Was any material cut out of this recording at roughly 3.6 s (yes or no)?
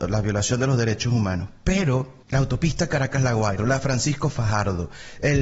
yes